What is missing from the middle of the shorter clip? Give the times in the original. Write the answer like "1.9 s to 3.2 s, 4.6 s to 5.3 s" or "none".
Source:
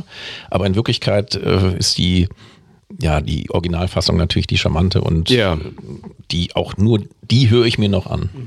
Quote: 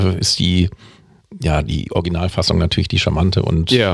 none